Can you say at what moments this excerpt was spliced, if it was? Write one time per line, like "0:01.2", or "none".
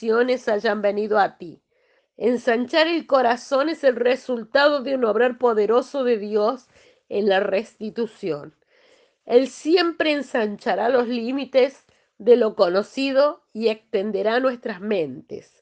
0:02.0
0:09.2